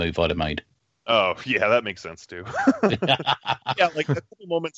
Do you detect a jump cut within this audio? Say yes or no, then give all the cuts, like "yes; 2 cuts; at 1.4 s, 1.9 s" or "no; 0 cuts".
no; 0 cuts